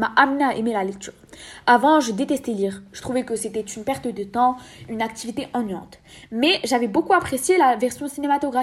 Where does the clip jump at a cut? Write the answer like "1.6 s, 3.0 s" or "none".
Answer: none